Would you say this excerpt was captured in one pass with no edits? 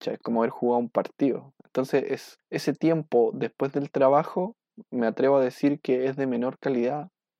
no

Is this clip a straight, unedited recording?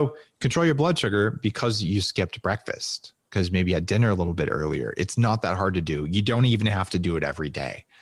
yes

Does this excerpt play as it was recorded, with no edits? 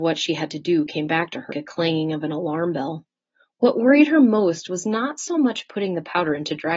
no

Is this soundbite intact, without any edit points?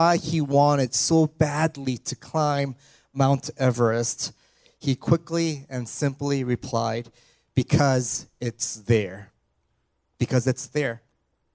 yes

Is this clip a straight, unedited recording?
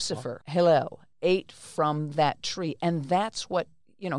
yes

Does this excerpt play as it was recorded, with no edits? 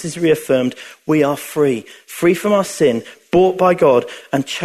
yes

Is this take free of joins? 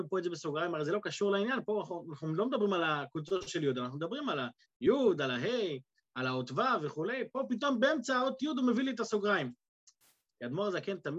yes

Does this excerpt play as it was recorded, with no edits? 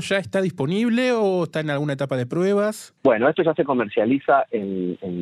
no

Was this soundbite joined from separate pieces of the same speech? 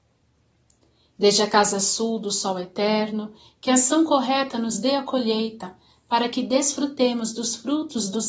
no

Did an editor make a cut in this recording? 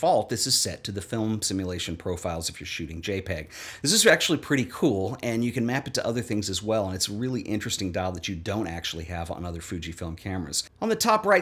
no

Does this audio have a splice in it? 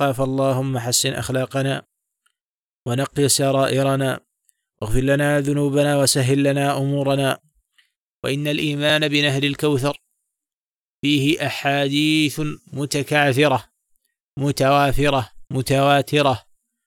yes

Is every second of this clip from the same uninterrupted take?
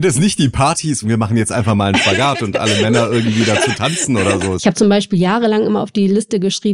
no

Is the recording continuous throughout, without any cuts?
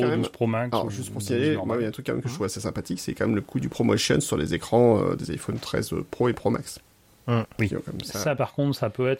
yes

